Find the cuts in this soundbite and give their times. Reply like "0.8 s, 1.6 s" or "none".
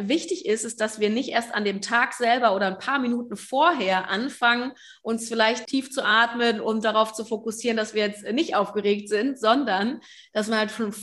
5.7 s